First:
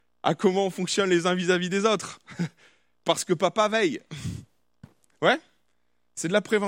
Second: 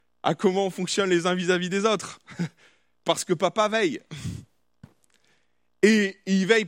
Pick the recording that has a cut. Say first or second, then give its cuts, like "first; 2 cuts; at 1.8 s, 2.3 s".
first; 1 cut; at 5.1 s